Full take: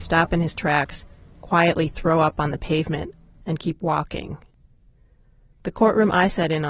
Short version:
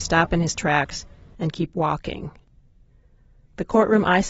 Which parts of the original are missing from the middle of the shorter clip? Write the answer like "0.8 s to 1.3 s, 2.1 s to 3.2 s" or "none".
1.3 s to 3.4 s

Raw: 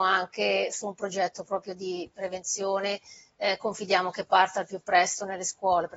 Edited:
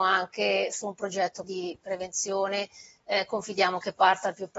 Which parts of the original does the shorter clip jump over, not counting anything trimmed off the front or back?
1.4 s to 1.8 s

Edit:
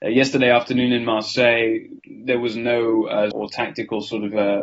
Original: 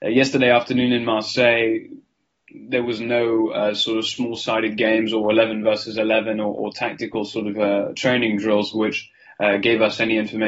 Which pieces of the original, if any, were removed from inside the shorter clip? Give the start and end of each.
2.0 s to 2.4 s, 3.8 s to 6.5 s

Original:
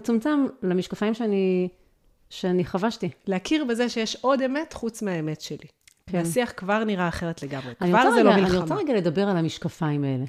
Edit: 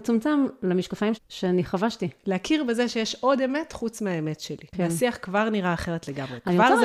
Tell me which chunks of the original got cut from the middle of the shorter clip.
1.1 s to 2.2 s, 5.7 s to 6.0 s

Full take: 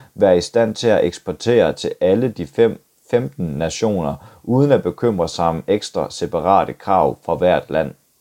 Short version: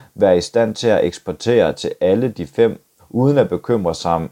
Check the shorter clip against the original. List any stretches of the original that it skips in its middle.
3.0 s to 4.3 s

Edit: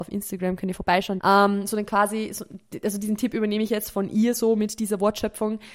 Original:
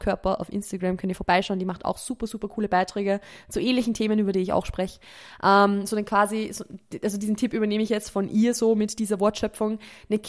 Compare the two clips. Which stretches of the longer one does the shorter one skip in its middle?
1.6 s to 5.4 s

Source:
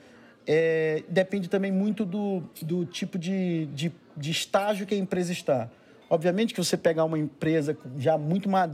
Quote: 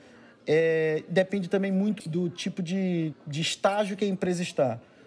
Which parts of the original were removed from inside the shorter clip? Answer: 2.0 s to 2.5 s, 3.7 s to 4.0 s

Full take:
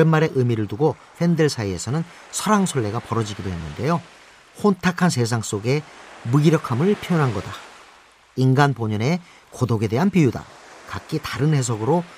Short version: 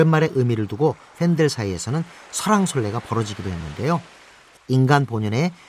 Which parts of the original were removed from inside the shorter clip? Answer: 4.6 s to 8.2 s

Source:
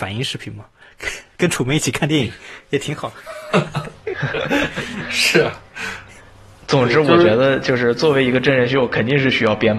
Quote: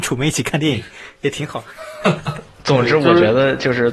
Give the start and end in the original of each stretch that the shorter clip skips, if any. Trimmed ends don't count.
4.0 s to 6.6 s

